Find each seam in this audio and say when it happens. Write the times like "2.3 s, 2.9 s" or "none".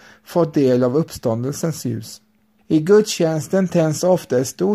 2.6 s